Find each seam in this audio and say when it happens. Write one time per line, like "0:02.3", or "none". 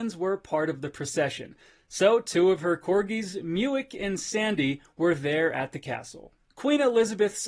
none